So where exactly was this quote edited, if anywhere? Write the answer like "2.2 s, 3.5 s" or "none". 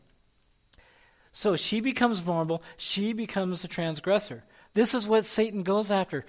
4.7 s